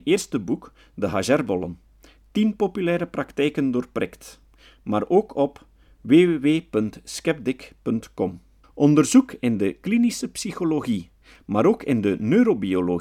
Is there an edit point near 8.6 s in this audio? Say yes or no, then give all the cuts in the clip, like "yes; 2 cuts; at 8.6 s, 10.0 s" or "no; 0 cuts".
yes; 1 cut; at 8.6 s